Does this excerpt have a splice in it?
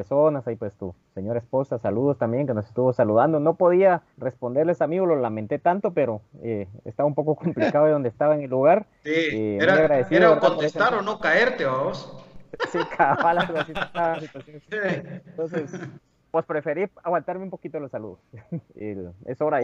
yes; 2 cuts; at 4.1 s, 18.6 s

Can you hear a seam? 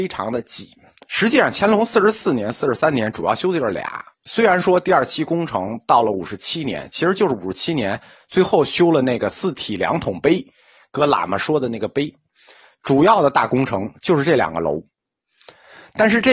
no; 0 cuts

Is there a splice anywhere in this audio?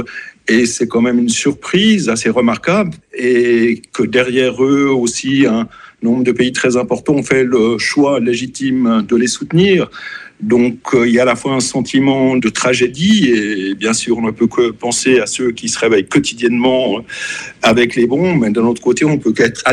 yes; 1 cut; at 3.0 s

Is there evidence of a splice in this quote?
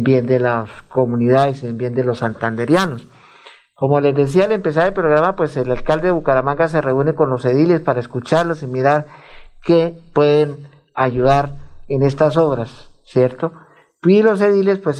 no; 0 cuts

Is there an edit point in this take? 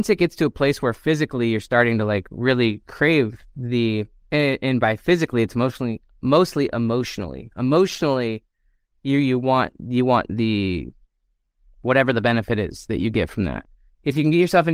no; 0 cuts

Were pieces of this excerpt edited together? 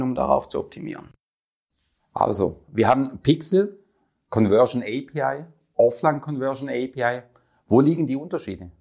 no; 0 cuts

